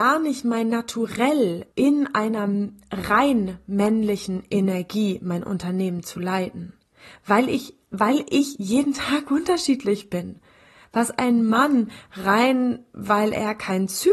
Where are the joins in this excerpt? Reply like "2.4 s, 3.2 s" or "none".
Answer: 1.7 s